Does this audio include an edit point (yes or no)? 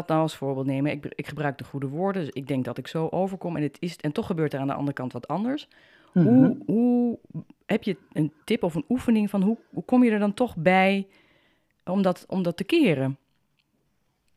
no